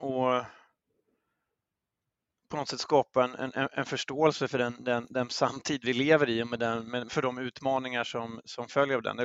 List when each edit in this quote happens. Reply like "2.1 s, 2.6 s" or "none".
7.1 s